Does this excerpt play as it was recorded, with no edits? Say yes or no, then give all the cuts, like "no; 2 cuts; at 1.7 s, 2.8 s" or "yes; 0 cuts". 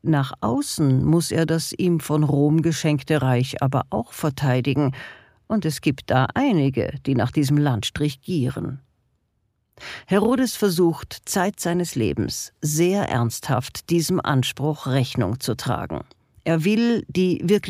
yes; 0 cuts